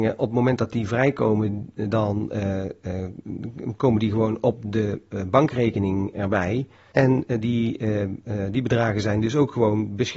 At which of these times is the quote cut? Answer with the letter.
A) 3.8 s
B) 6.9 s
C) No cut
B